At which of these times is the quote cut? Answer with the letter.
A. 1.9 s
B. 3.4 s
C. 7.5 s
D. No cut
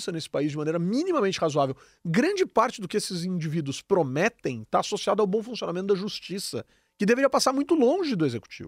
D